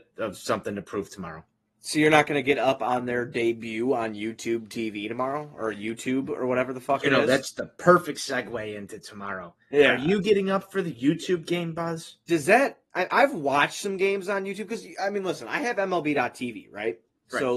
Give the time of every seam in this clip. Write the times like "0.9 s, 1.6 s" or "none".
none